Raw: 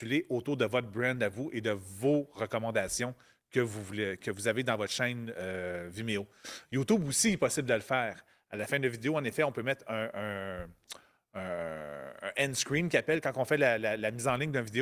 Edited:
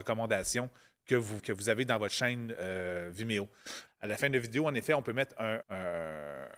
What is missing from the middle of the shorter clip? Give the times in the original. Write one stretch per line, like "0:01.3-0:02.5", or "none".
0:03.8-0:04.2
0:06.7-0:08.4
0:10.1-0:11.3